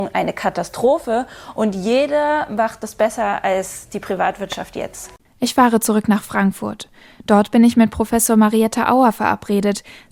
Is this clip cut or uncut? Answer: cut